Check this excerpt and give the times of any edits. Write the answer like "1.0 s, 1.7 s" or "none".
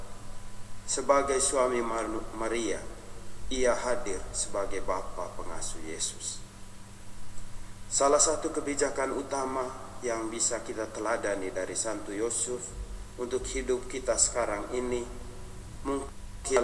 none